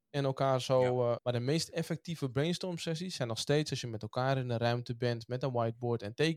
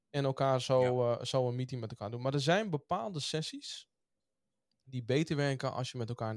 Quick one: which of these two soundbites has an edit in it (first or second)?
first